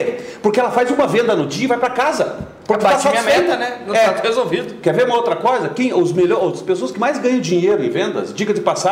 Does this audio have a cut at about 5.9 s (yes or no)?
no